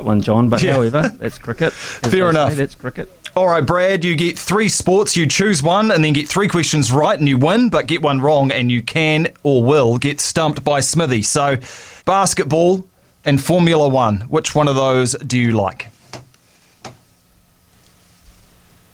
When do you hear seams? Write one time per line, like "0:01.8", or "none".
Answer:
0:12.0